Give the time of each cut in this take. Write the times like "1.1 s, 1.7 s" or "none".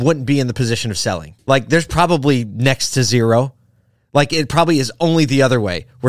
1.4 s